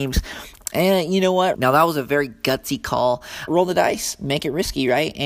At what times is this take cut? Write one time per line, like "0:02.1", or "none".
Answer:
0:01.5
0:03.5